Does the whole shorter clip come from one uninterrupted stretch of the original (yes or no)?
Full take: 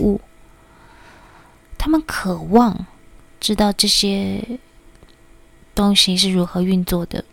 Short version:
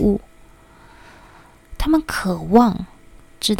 yes